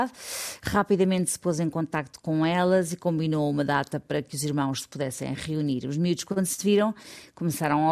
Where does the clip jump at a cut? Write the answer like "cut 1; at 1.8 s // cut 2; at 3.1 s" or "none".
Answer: none